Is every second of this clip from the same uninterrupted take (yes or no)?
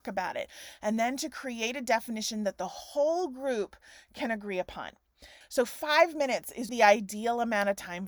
no